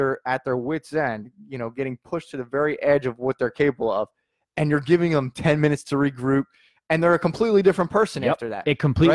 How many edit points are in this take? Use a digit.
0